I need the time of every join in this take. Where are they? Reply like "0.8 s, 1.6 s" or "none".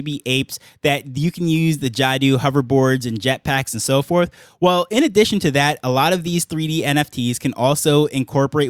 none